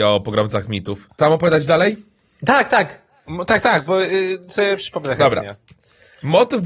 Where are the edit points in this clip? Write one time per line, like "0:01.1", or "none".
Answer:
0:01.1